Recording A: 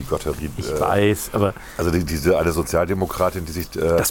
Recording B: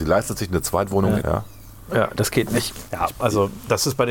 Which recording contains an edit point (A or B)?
B